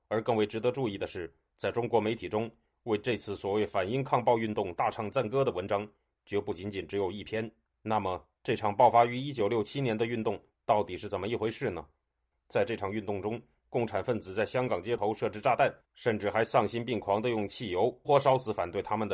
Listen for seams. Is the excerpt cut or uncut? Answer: cut